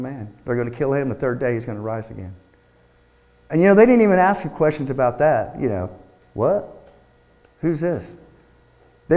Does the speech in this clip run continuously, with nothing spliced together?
yes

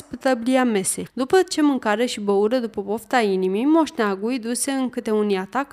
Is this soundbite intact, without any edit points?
no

